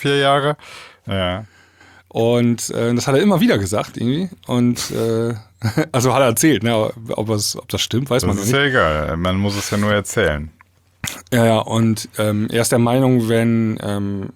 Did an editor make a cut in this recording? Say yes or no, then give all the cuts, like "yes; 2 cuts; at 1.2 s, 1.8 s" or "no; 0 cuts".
yes; 1 cut; at 1.1 s